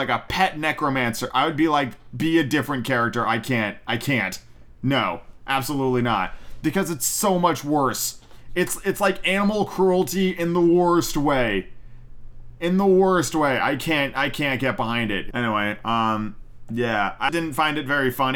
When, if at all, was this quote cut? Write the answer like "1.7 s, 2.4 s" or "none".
15.3 s, 17.3 s